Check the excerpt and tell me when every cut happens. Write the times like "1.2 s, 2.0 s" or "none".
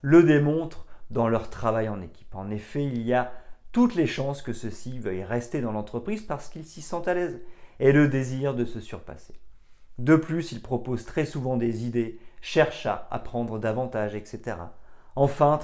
none